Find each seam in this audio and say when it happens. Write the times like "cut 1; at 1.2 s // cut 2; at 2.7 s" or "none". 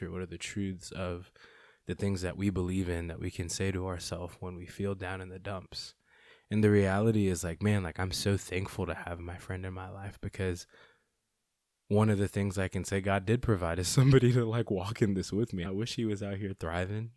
cut 1; at 15.6 s